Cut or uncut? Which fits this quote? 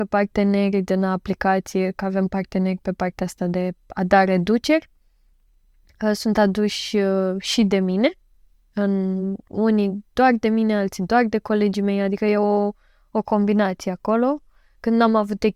uncut